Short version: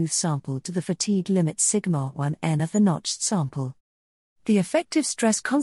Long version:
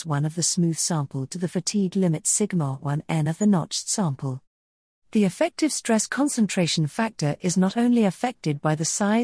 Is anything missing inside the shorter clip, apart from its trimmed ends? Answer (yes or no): no